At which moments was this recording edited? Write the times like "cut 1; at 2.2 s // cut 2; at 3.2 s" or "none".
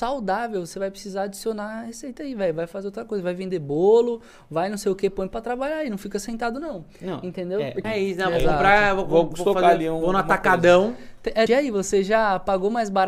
cut 1; at 7.8 s // cut 2; at 11.5 s